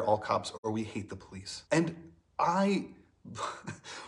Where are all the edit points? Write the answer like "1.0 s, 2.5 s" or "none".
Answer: 1.7 s